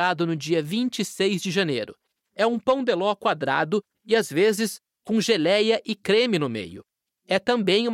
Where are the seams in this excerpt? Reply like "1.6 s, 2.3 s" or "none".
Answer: 3.9 s